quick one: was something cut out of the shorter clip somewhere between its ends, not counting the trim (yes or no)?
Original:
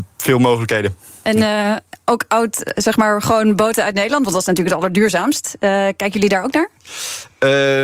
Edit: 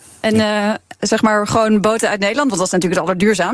yes